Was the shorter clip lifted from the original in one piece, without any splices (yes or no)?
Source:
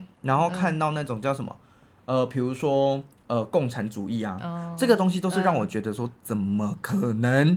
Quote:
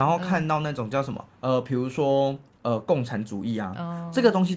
no